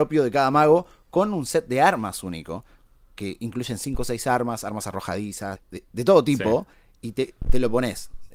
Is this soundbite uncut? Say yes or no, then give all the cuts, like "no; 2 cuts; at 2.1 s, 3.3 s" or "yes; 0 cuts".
no; 1 cut; at 5.6 s